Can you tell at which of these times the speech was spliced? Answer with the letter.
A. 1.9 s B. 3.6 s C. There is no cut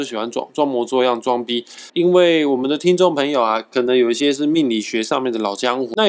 A